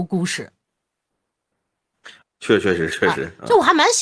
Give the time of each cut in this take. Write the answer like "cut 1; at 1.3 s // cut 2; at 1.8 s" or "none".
cut 1; at 2.2 s